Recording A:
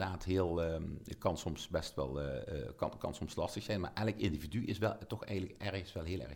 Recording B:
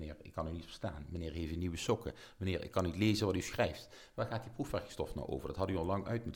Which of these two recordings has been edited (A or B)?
B